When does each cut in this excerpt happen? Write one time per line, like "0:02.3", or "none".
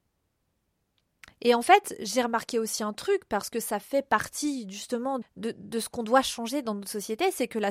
0:05.2